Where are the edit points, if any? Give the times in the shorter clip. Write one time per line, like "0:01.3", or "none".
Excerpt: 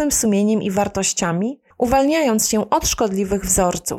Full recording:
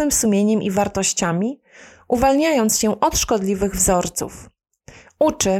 0:01.7